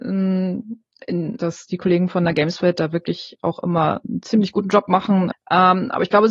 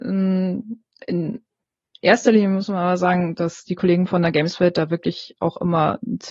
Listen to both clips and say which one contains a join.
first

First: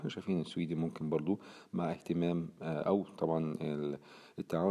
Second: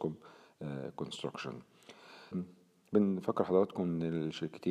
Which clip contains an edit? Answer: second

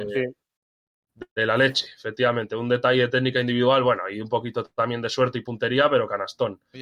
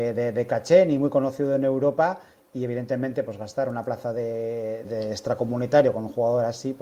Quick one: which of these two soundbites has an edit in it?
second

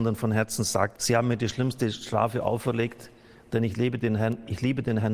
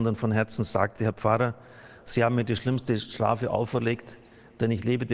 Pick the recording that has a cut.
first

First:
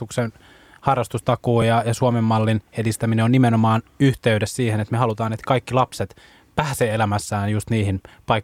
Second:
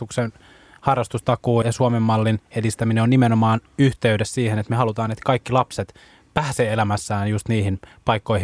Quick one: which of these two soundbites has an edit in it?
second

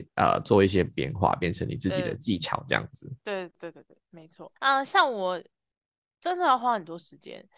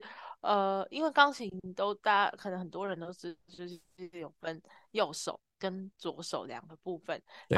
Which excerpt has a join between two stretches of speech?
first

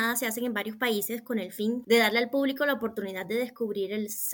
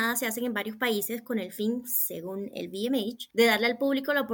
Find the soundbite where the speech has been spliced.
first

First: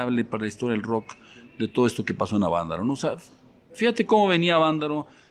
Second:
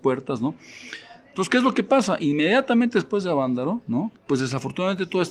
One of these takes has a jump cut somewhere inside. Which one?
second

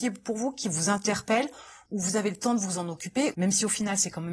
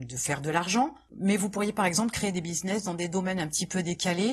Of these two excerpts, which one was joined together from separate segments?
first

